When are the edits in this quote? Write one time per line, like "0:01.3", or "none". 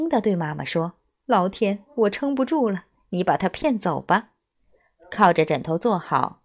0:04.5